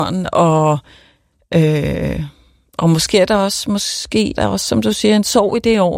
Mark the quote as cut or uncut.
cut